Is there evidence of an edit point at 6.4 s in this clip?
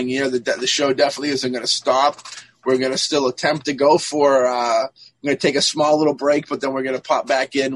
no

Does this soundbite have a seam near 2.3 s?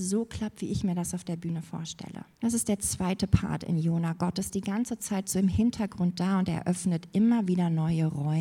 yes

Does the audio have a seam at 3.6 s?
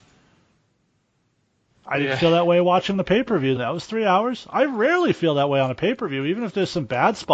yes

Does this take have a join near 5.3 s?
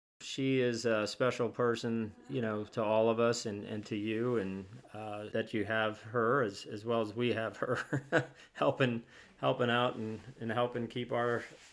yes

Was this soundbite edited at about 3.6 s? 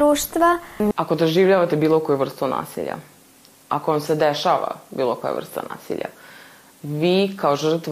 no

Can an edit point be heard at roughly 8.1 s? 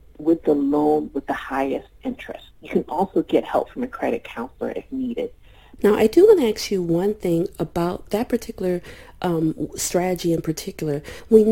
yes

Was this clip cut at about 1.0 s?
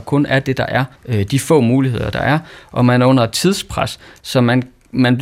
yes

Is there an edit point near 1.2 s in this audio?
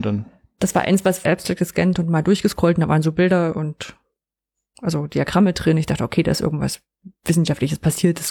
yes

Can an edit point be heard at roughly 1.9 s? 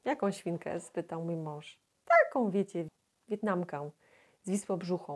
no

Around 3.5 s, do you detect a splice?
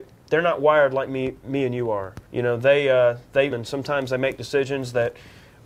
yes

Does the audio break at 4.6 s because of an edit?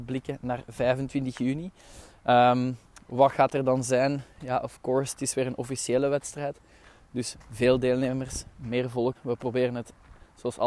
no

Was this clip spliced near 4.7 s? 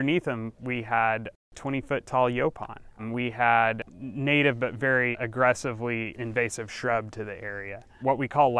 no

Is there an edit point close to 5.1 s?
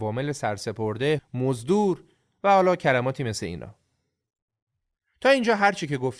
no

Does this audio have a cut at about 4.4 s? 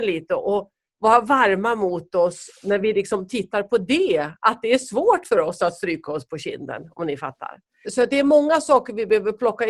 no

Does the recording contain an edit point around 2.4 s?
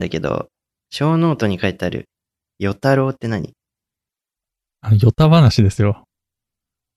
no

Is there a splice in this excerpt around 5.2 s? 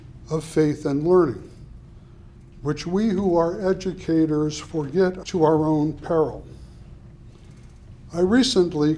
yes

